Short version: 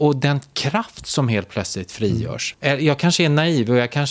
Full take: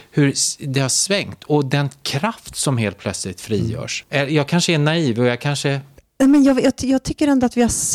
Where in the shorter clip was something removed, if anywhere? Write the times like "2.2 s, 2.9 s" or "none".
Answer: none

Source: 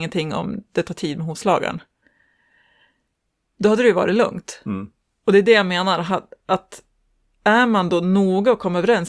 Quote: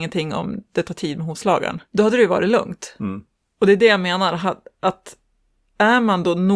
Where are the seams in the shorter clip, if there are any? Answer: 1.9 s

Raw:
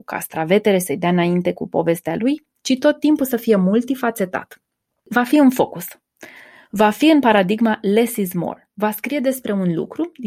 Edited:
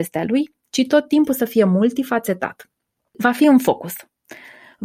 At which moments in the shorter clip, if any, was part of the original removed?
none

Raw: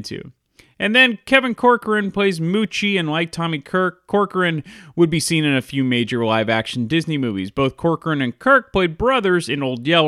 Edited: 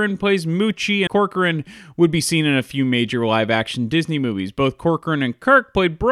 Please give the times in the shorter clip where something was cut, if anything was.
1.1 s

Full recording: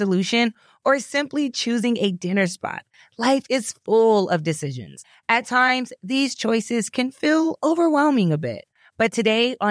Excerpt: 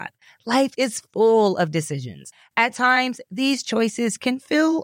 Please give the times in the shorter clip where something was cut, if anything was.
none

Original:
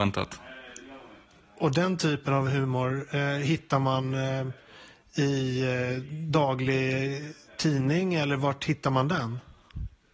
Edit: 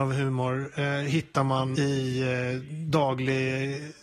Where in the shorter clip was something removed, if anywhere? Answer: 1.7 s

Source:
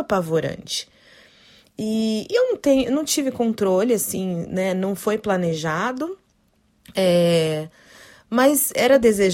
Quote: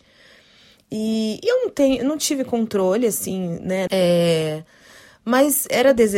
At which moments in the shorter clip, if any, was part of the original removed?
3.9 s

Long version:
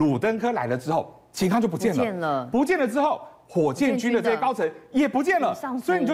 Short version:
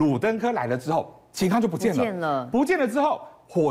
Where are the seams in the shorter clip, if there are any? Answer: none

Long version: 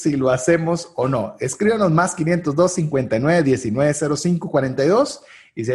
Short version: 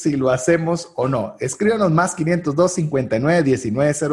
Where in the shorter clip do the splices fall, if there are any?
none

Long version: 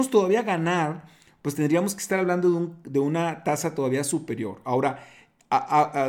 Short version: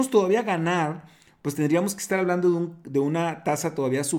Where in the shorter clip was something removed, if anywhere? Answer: none

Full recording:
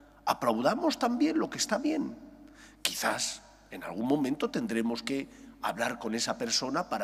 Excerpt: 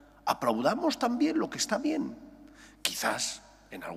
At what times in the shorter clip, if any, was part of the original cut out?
none

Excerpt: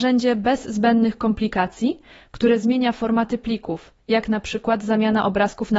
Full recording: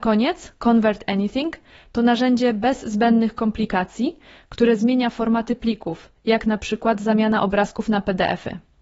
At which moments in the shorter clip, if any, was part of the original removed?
none

